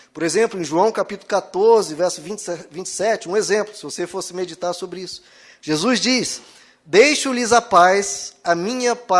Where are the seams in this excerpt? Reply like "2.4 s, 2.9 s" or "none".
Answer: none